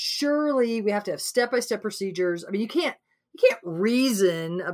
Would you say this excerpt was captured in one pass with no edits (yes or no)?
yes